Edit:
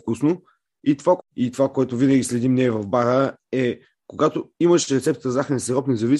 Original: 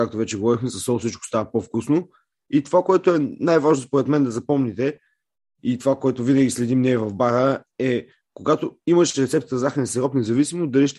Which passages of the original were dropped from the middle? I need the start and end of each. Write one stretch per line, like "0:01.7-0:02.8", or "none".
0:02.8-0:05.4